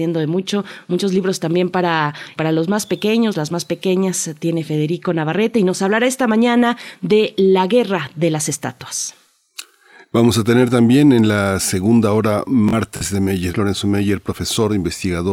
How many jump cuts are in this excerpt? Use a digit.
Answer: 2